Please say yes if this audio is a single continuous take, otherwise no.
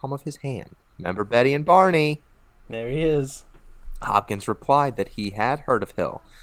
no